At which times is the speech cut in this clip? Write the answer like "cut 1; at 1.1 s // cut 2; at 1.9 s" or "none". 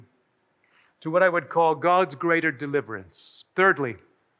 none